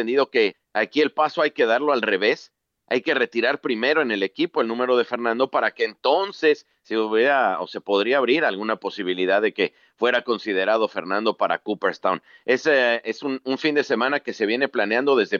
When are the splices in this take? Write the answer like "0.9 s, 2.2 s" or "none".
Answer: none